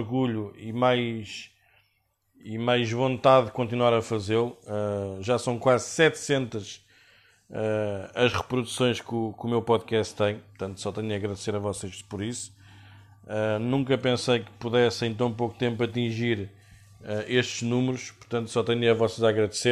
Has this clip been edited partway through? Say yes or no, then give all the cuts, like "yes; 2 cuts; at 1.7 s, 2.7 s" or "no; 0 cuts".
no; 0 cuts